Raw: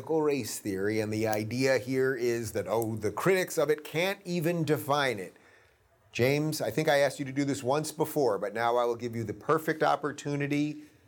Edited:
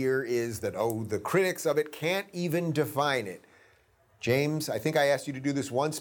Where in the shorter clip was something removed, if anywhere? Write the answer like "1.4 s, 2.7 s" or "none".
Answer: none